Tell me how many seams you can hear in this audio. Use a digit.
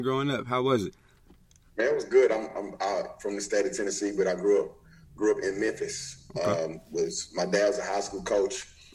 0